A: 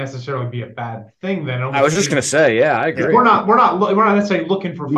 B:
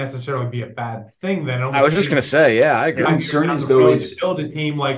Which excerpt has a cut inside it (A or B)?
B